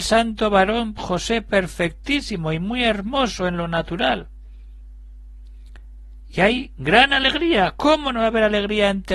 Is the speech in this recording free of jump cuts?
yes; 0 cuts

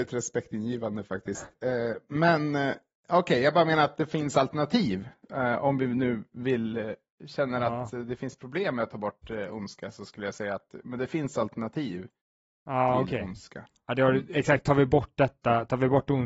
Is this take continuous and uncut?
yes; 0 cuts

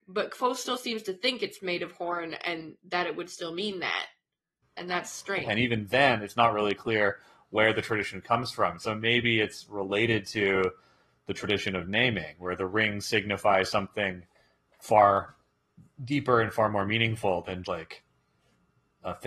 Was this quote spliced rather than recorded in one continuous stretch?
yes; 2 cuts; at 5.5 s, 17.6 s

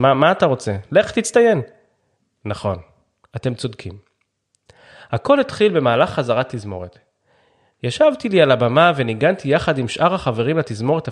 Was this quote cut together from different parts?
no; 0 cuts

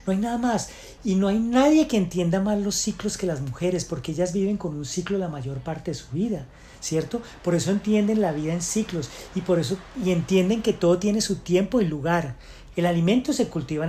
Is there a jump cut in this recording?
yes; 1 cut; at 12.7 s

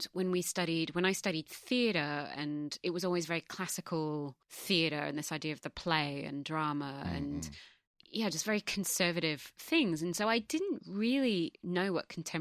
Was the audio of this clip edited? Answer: yes; 1 cut; at 4.4 s

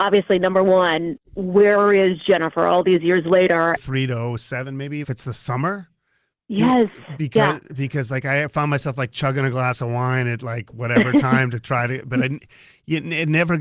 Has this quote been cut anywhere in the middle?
yes; 2 cuts; at 3.8 s, 5.0 s

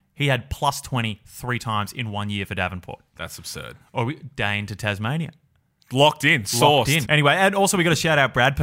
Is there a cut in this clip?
yes; 1 cut; at 7.1 s

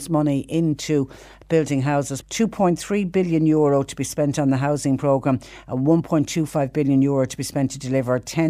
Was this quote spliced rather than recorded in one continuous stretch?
yes; 1 cut; at 2.2 s

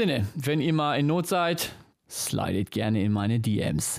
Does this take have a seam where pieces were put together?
yes; 1 cut; at 1.9 s

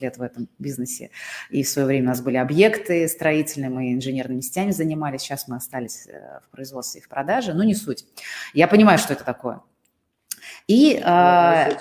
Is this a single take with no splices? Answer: yes; 0 cuts

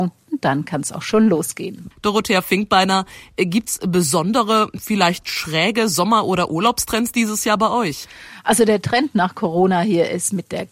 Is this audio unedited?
no; 1 cut; at 1.9 s

